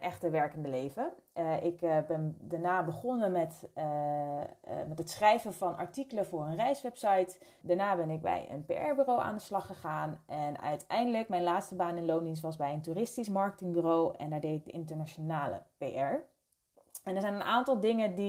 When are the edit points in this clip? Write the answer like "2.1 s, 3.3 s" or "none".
7.6 s